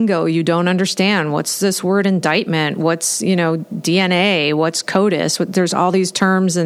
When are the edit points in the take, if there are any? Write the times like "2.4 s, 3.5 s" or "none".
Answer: none